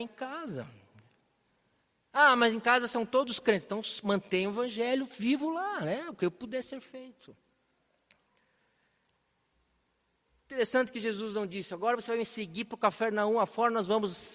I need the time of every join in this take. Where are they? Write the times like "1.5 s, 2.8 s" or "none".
none